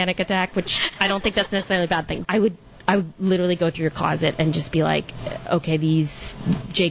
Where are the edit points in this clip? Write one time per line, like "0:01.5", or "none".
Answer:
0:02.2